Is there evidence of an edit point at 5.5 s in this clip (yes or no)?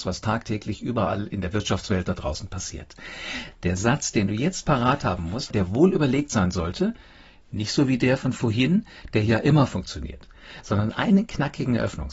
yes